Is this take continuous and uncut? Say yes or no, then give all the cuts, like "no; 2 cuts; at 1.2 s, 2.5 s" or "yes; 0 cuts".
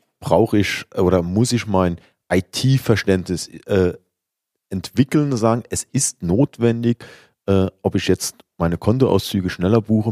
yes; 0 cuts